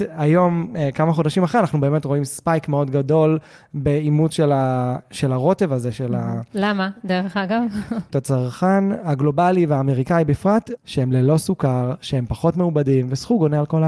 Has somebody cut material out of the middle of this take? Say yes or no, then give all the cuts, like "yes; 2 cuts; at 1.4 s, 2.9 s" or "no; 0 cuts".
yes; 2 cuts; at 8.1 s, 10.8 s